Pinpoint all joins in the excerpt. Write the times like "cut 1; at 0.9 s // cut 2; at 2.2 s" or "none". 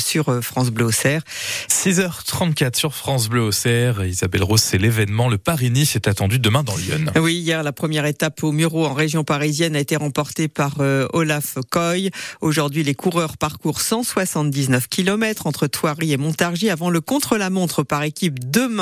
cut 1; at 1.7 s